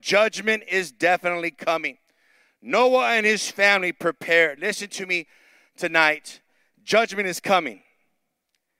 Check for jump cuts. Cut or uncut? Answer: uncut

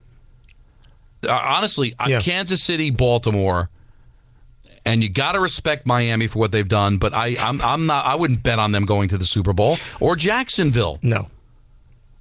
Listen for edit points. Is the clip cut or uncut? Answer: cut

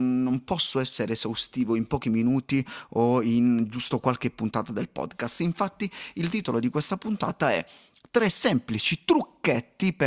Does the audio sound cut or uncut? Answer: uncut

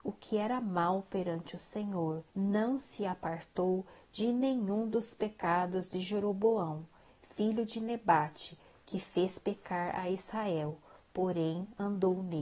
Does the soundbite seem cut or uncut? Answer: cut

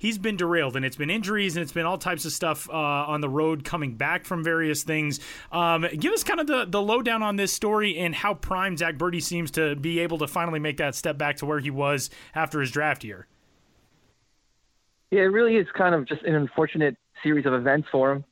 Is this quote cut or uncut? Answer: uncut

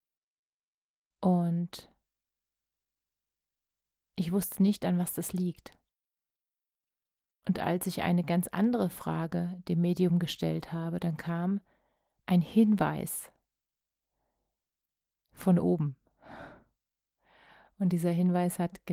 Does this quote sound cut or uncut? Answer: uncut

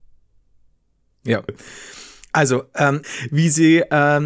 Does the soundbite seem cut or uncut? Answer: cut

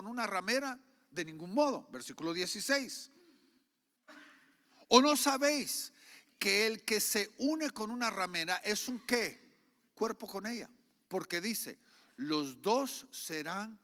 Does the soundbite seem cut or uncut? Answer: uncut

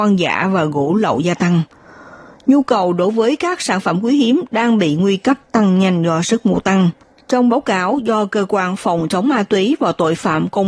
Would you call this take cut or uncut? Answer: cut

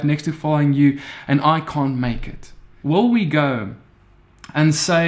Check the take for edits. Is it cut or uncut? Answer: cut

